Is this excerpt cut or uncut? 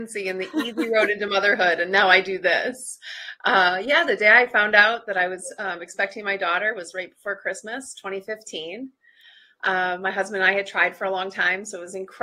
uncut